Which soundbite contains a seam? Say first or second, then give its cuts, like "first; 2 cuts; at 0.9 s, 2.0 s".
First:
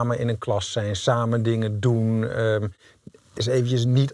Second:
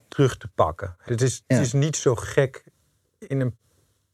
second; 1 cut; at 1.1 s